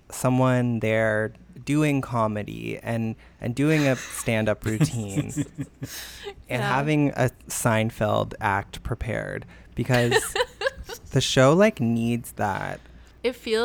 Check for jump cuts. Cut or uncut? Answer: uncut